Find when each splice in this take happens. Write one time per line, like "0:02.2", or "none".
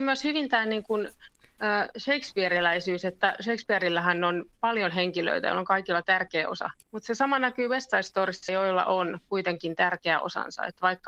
0:06.8
0:08.5